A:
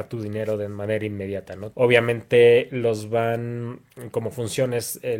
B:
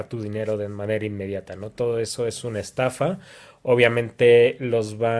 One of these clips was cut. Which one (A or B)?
A